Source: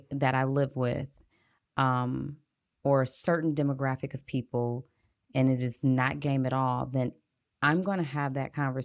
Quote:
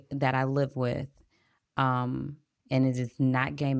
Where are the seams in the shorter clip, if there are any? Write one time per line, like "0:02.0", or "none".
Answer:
0:02.6